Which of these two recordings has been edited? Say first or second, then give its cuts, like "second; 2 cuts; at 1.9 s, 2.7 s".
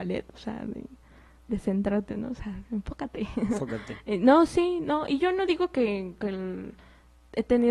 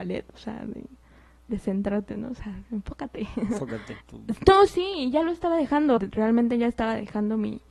second; 2 cuts; at 4.0 s, 6.0 s